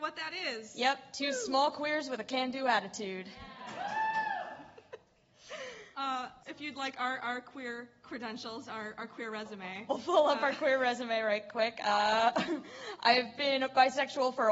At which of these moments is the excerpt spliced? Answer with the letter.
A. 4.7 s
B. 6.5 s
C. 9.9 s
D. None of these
B